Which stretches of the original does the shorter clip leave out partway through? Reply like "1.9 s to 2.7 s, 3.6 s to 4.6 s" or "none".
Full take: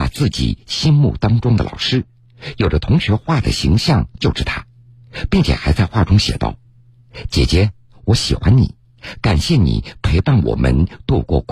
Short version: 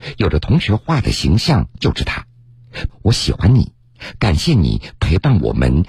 5.3 s to 7.9 s